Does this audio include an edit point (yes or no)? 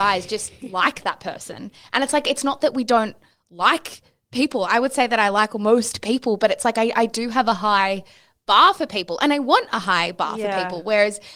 no